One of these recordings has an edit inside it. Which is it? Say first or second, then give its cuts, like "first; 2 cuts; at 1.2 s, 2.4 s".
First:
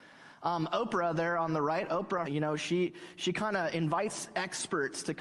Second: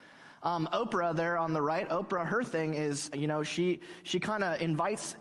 first; 1 cut; at 2.2 s